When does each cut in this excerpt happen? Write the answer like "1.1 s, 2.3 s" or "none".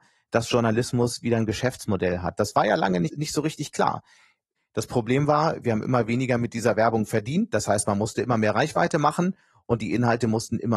4.6 s

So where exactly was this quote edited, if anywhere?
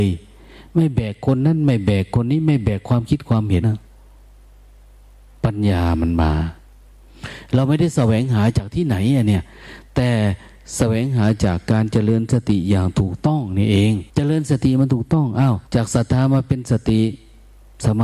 3.6 s, 14.1 s, 15.7 s

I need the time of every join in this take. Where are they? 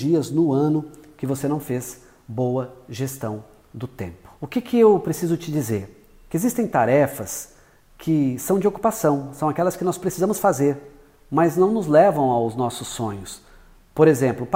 4.4 s

